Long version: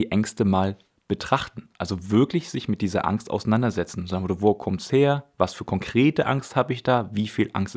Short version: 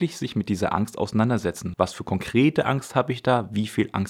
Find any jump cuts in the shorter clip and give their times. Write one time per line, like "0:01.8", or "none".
0:01.7